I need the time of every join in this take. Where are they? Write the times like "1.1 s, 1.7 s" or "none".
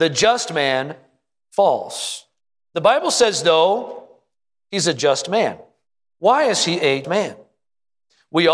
7.0 s